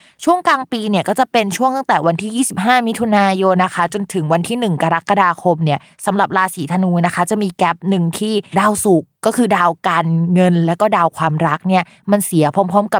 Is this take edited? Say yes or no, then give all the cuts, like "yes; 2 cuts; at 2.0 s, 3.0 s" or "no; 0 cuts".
yes; 1 cut; at 3.6 s